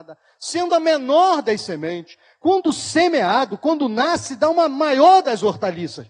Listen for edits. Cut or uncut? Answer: uncut